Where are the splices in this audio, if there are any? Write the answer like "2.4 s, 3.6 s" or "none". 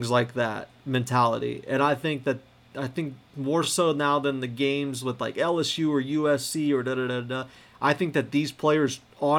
none